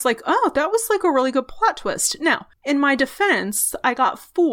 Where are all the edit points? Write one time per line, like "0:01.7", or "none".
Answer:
0:02.5